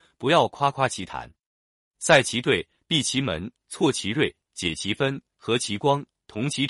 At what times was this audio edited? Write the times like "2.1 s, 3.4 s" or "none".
none